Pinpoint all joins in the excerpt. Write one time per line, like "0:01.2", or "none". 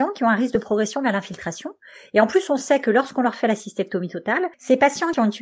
none